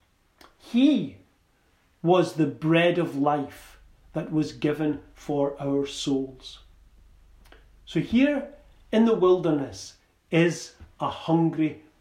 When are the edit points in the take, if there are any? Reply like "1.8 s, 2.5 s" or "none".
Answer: none